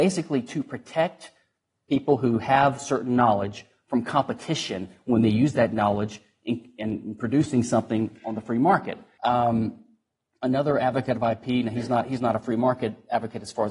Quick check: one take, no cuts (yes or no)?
no